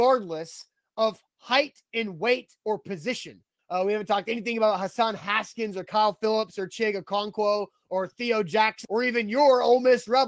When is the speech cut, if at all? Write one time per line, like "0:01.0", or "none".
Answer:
0:03.6
0:08.8